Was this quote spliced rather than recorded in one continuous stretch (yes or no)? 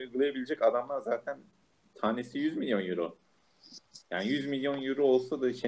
no